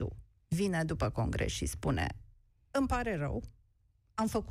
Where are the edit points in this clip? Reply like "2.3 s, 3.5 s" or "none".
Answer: none

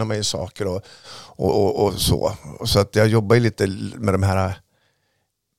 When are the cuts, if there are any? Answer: none

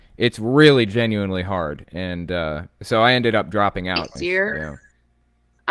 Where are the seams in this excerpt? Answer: 4.2 s

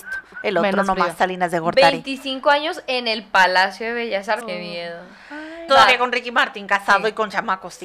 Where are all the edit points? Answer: 4.4 s, 5.7 s

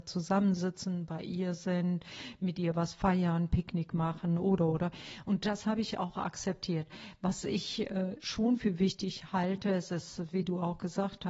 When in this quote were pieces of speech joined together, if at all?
none

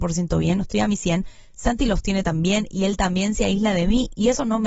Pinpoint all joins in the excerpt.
none

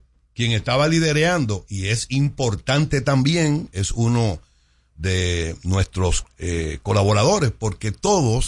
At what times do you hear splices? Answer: none

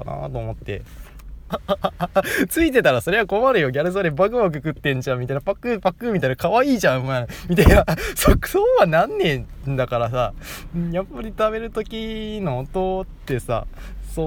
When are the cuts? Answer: 1.5 s

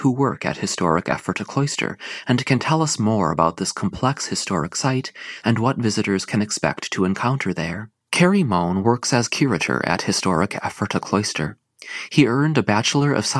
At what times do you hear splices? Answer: 5.4 s, 8.0 s

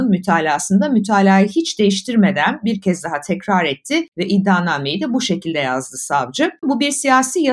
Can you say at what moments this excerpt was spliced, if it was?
6.6 s

